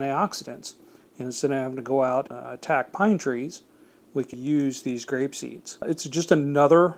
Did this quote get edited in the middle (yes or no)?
yes